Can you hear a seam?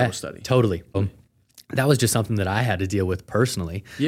yes; 1 cut; at 0.9 s

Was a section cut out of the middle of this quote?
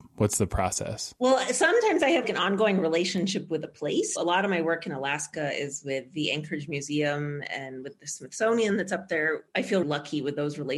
yes; 3 cuts; at 2.2 s, 4.2 s, 9.8 s

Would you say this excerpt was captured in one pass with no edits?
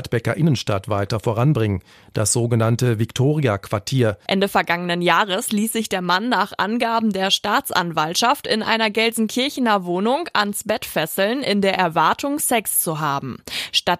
no; 1 cut; at 4.3 s

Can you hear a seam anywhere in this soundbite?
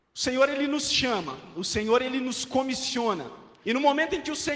yes; 1 cut; at 3.6 s

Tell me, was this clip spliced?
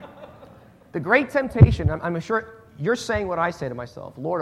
no; 0 cuts

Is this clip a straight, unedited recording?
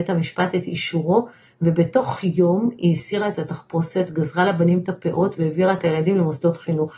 yes; 0 cuts

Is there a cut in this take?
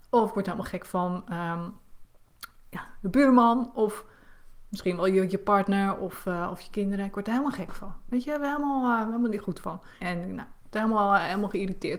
yes; 1 cut; at 10.0 s

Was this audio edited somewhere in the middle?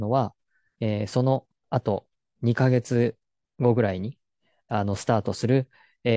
yes; 1 cut; at 1.6 s

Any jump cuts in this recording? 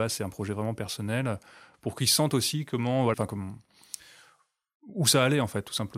yes; 2 cuts; at 1.7 s, 3.1 s

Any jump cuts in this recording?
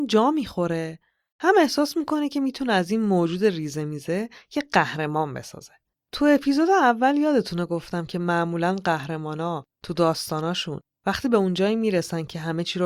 yes; 1 cut; at 6.0 s

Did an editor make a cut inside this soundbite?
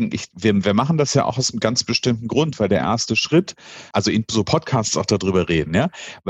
yes; 1 cut; at 3.9 s

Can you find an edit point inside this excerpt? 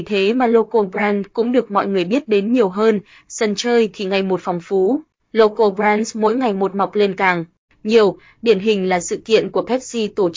no; 0 cuts

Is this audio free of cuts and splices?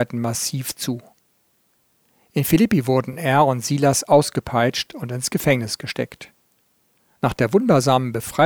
yes; 0 cuts

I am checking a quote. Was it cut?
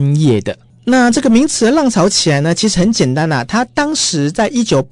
no; 0 cuts

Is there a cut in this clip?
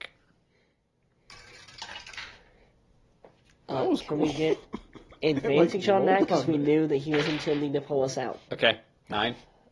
yes; 1 cut; at 8.5 s

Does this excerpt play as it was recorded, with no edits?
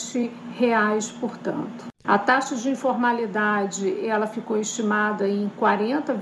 no; 1 cut; at 2.0 s

